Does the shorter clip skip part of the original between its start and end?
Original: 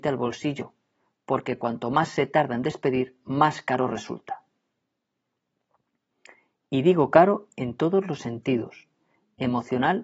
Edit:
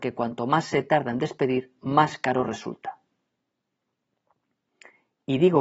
no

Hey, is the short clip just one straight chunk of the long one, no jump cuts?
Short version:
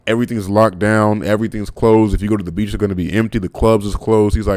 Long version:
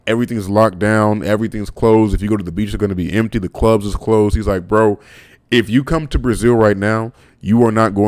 yes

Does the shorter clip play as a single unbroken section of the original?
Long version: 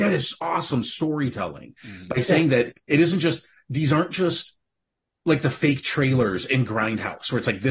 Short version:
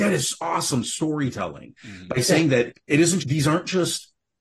no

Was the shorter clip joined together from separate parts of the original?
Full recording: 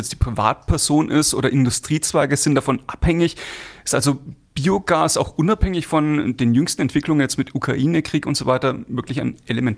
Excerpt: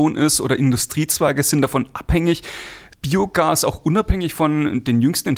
yes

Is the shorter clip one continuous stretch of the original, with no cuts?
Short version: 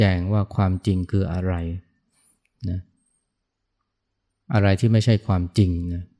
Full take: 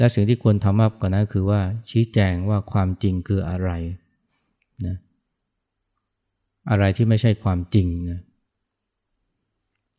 yes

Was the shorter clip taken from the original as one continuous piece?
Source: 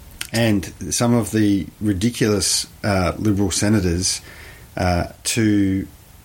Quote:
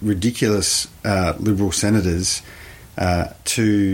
yes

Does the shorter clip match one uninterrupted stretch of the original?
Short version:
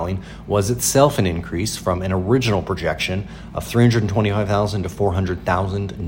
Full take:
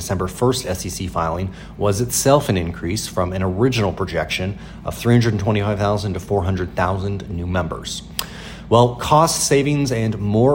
yes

